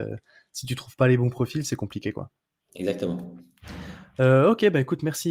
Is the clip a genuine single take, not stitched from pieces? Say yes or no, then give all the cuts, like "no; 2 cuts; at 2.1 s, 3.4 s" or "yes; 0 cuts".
yes; 0 cuts